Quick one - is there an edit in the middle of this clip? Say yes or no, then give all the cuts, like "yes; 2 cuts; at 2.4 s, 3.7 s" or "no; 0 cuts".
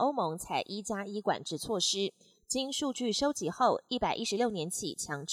no; 0 cuts